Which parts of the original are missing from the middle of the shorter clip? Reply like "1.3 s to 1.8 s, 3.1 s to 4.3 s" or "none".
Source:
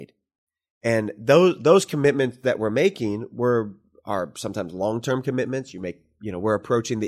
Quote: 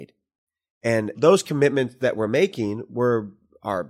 1.1 s to 1.6 s

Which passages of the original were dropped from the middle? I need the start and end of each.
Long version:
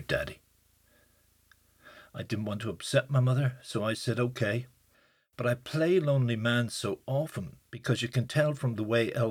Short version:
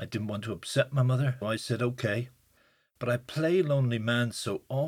3.6 s to 3.8 s

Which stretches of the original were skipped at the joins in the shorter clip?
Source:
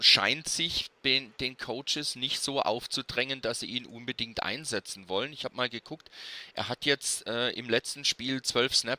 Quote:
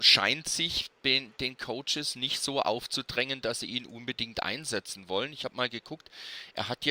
none

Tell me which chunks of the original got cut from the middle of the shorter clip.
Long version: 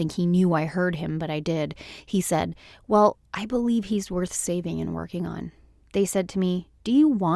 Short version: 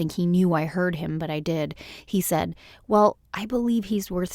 none

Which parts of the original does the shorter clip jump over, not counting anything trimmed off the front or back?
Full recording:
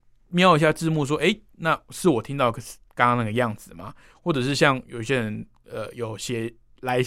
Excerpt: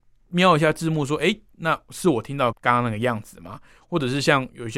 2.5 s to 2.9 s

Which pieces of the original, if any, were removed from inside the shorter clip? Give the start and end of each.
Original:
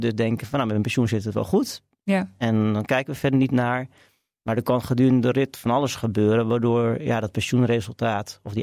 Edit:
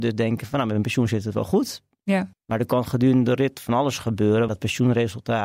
2.3 s to 4.3 s, 6.4 s to 7.2 s

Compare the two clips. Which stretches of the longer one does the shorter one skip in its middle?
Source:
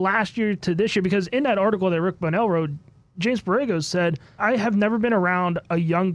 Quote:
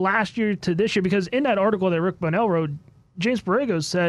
none

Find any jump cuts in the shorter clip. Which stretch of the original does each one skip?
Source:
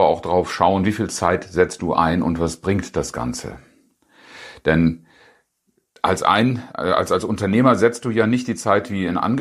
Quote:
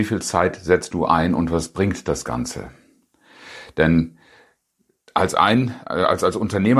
none

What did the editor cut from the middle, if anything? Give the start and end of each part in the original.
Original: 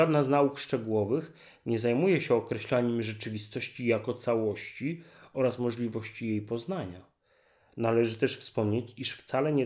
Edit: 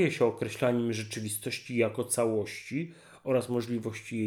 none

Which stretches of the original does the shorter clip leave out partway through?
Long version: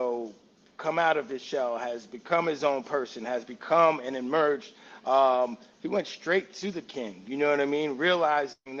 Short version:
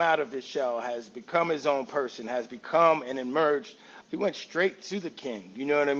5.0 s to 5.7 s

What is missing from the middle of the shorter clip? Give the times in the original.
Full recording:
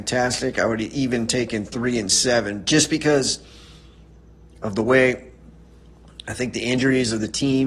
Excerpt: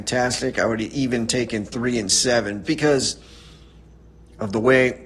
2.6 s to 2.9 s

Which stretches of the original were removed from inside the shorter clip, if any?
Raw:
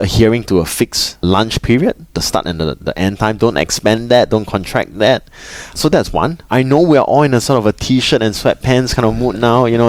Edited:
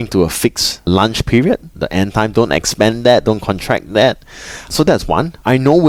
2.1 s to 2.8 s

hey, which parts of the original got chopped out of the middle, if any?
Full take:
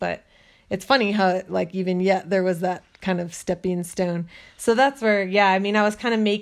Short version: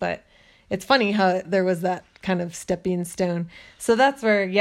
1.4 s to 2.2 s

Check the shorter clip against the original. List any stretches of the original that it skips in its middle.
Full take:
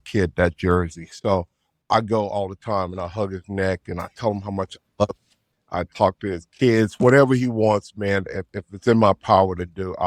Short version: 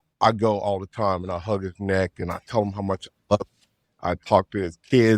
none

